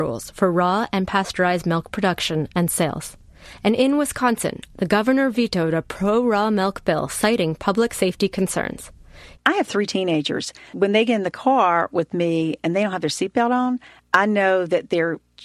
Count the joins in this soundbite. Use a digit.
2